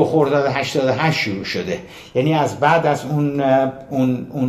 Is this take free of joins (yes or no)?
yes